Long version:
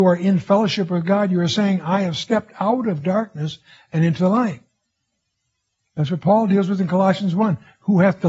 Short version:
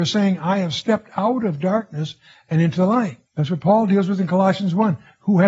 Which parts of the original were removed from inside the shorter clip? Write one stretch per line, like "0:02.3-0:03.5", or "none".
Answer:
0:04.7-0:05.9